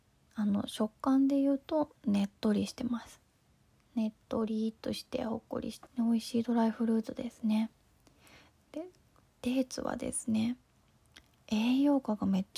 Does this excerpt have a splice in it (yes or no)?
yes